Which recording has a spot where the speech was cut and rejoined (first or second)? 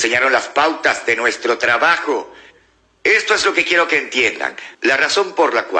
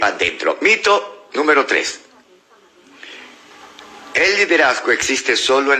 first